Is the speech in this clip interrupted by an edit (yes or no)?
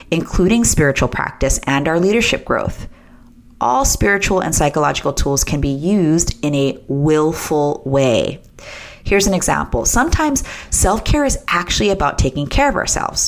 no